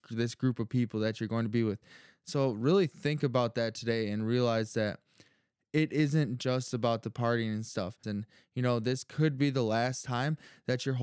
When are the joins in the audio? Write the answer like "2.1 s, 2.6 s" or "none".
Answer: 8.0 s